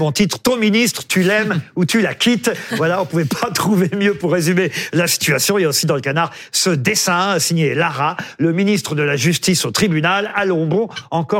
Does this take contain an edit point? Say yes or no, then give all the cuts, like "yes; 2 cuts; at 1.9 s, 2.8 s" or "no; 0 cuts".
no; 0 cuts